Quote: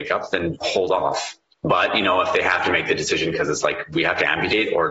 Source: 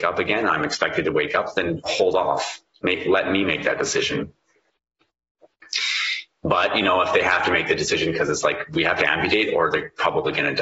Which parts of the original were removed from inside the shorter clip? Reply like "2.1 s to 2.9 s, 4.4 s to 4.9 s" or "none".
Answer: 2.8 s to 6.3 s